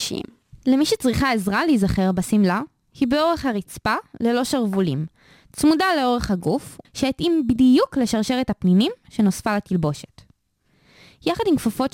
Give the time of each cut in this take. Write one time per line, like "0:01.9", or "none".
0:06.8